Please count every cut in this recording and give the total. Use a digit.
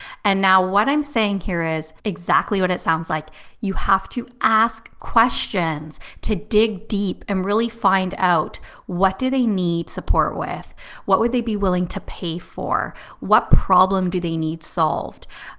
1